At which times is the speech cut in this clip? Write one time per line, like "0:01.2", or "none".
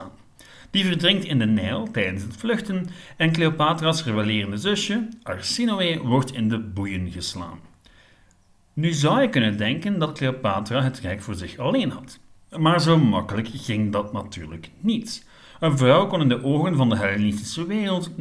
none